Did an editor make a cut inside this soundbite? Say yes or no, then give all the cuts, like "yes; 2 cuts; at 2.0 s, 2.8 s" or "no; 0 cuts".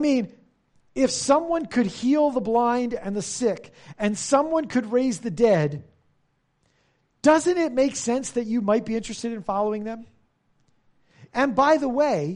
yes; 1 cut; at 11.3 s